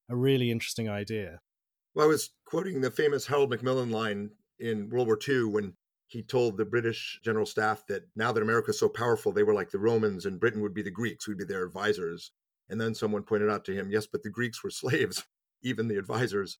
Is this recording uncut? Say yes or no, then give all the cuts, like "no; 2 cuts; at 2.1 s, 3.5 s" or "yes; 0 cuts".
yes; 0 cuts